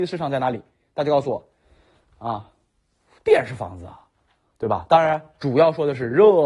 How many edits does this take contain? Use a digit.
0